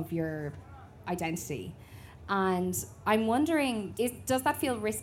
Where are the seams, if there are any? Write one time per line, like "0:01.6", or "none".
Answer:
0:03.9

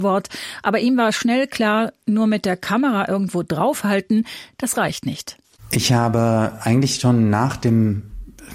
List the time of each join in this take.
none

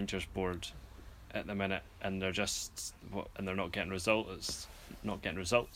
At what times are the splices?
none

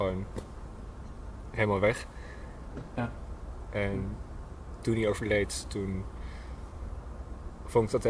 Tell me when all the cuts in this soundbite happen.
0:03.0

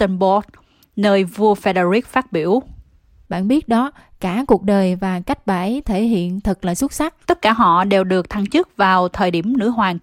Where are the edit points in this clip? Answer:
0:03.3
0:07.2

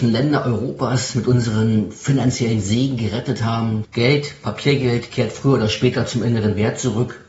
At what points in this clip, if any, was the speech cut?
0:03.8

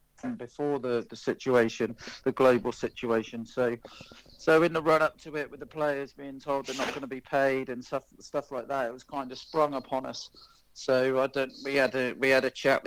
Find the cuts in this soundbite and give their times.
none

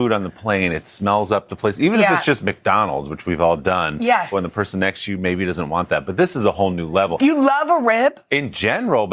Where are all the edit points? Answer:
0:04.3
0:07.2

